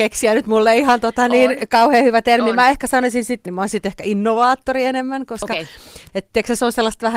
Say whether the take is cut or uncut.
cut